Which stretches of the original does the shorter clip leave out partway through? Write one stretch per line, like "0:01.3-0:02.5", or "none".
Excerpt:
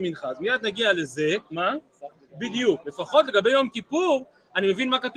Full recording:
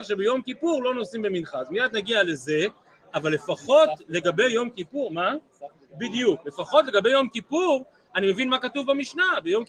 0:02.8-0:05.1